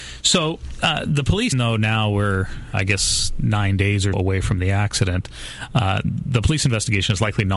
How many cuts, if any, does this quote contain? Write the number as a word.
three